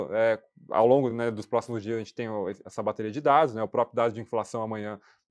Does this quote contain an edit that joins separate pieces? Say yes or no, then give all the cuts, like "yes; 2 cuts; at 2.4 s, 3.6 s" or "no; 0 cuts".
no; 0 cuts